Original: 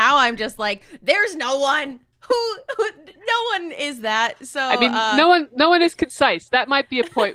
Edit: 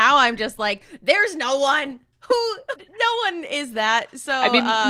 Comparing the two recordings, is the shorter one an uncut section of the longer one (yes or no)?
no